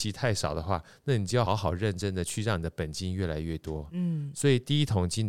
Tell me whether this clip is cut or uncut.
cut